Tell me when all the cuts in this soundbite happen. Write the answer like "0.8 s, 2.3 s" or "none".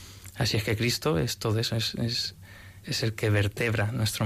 2.8 s